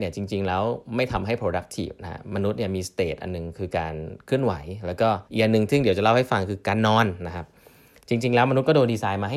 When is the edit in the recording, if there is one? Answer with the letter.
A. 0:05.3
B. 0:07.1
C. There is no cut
A